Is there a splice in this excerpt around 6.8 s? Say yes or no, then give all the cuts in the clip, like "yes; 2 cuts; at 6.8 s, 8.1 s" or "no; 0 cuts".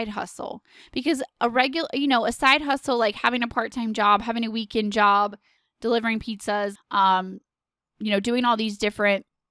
yes; 1 cut; at 6.8 s